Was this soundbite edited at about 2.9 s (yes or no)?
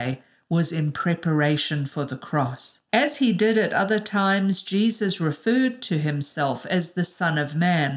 yes